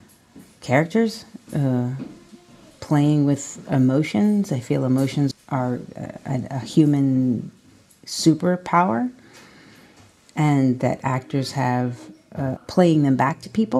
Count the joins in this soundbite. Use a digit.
2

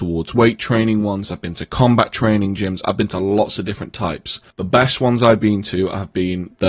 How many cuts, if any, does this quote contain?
1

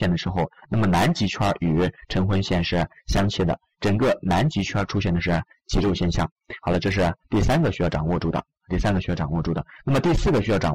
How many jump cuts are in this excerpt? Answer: 0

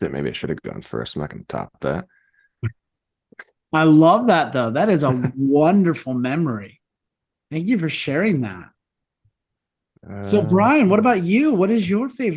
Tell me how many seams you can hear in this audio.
0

